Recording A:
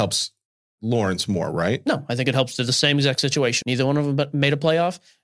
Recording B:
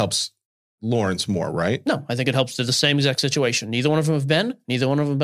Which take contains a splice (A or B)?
A